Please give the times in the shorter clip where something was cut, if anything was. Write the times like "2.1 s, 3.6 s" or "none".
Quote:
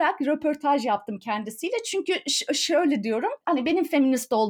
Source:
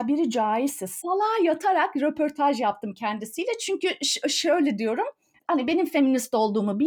3.4 s